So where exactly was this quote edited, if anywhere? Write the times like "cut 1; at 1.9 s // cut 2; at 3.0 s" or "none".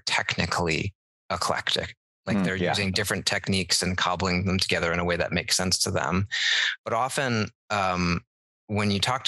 none